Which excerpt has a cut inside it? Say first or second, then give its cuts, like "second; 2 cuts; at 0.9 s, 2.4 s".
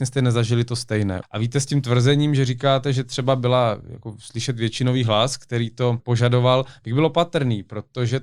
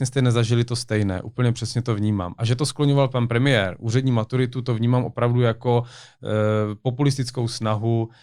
first; 2 cuts; at 1.2 s, 6.0 s